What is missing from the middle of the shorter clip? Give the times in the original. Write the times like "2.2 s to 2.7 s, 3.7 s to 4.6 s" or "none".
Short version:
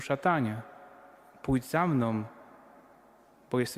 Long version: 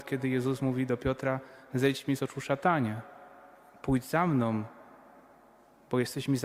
none